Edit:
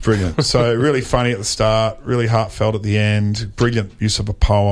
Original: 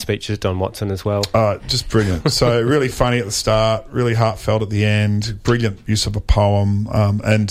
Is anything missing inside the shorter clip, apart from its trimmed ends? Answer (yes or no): no